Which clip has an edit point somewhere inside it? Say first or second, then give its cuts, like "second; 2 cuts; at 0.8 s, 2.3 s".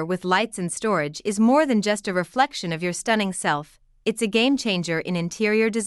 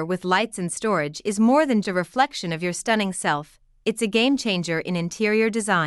second; 1 cut; at 1.8 s